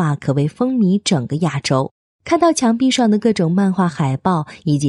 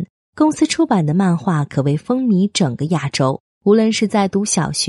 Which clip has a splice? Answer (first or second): second